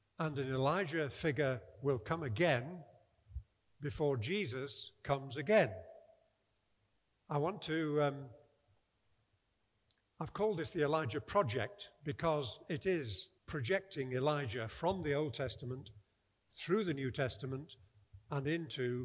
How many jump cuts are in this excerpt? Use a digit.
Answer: 2